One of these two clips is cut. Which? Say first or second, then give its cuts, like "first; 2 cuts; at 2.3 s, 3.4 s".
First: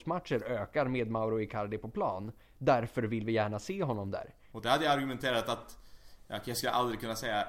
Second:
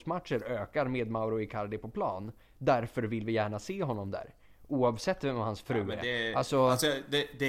first; 1 cut; at 4.5 s